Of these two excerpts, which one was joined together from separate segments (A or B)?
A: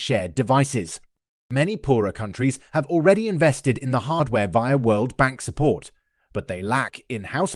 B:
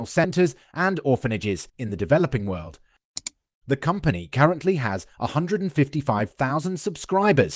A